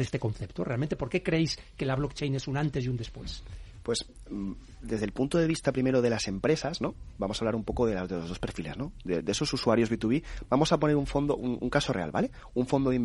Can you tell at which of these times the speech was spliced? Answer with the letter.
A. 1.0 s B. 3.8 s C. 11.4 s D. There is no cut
D